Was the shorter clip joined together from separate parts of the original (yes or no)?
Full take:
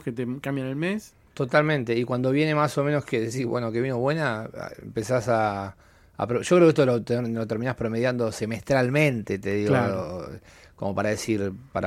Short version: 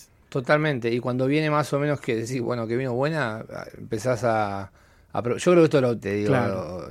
yes